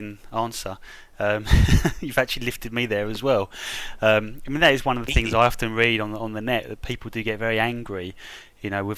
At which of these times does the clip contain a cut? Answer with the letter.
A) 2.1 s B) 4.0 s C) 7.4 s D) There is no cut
D